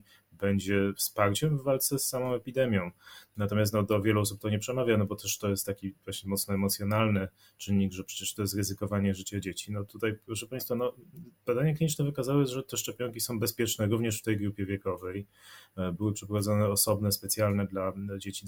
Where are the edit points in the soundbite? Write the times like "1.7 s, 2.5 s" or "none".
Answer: none